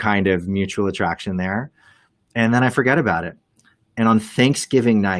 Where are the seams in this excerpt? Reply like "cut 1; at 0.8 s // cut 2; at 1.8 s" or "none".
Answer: none